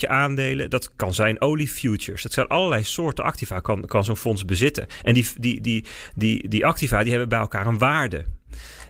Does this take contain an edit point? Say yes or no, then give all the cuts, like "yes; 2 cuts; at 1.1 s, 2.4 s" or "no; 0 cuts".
no; 0 cuts